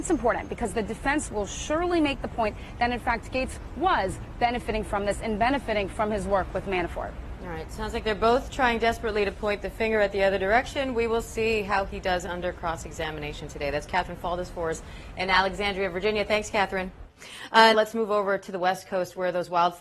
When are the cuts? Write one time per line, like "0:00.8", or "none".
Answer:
0:17.7